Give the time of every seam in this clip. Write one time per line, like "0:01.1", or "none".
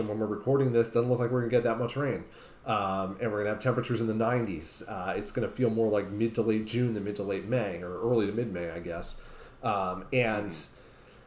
none

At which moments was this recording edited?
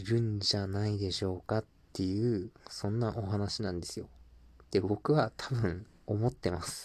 none

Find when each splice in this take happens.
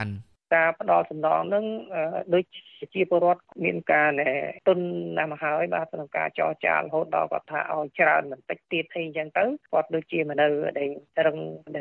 0:10.3

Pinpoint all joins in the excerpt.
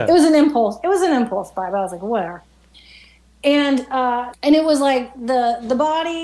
0:04.3

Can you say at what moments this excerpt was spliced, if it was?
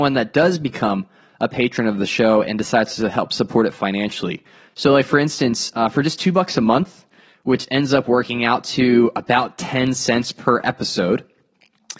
none

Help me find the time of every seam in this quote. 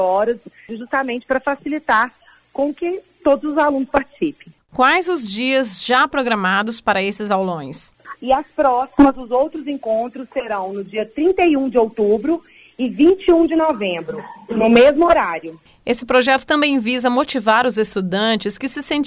0:08.2

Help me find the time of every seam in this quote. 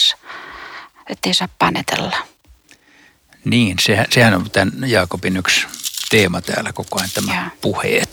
none

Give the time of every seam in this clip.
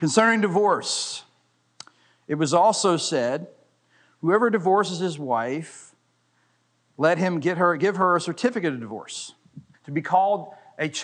0:09.7

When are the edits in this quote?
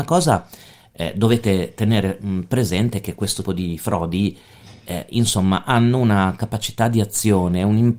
0:03.4

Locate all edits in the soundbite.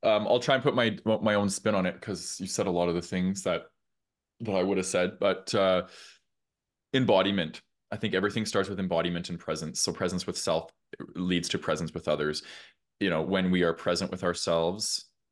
none

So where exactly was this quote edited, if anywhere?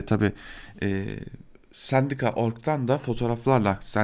none

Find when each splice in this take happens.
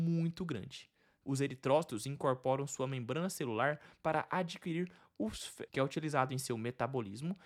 0:01.2
0:05.7

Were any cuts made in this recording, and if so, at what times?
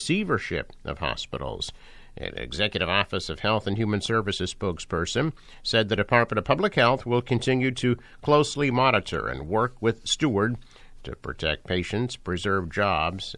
none

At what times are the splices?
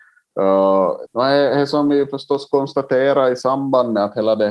0:01.1

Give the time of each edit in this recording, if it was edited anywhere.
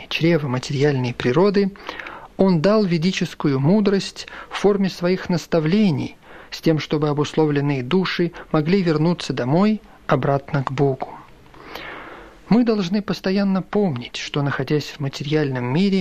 none

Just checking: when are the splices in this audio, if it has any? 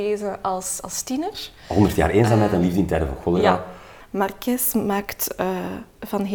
none

